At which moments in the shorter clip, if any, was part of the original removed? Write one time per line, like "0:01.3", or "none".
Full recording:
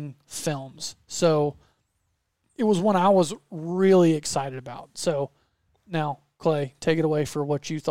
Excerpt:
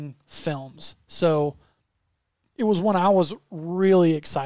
none